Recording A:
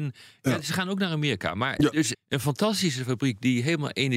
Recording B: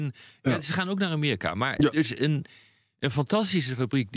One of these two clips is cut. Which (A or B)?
A